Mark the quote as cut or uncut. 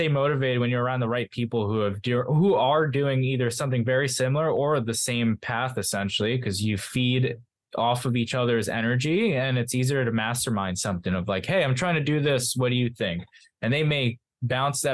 uncut